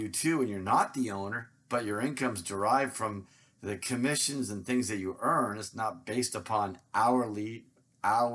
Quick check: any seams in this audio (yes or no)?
no